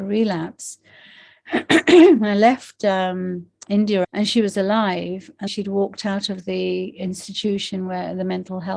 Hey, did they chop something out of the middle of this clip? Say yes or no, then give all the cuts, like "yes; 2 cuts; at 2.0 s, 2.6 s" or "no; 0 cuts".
yes; 2 cuts; at 4.0 s, 5.5 s